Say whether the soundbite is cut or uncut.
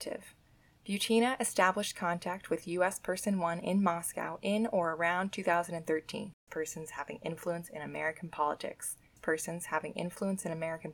cut